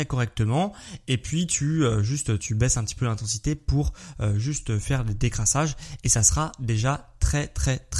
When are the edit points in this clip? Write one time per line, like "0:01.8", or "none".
none